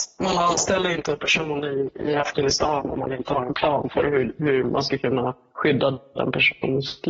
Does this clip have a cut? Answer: no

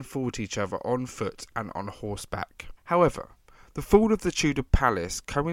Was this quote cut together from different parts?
yes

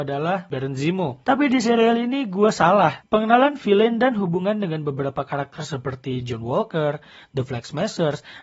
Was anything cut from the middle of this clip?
yes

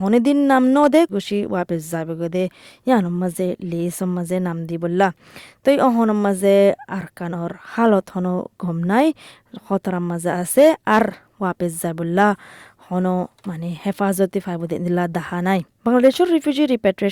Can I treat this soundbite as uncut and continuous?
no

